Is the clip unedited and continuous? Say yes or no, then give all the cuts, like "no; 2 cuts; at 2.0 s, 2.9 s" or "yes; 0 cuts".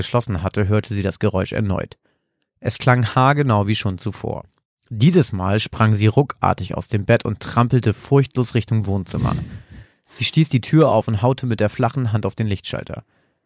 yes; 0 cuts